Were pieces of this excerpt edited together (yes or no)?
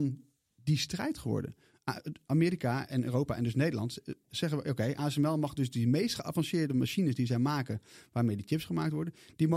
no